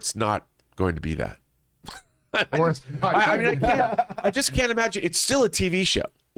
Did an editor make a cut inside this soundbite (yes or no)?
no